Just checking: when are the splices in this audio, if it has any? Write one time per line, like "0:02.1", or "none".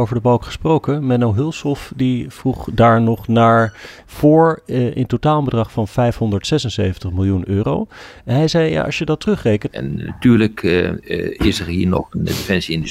0:04.0
0:09.7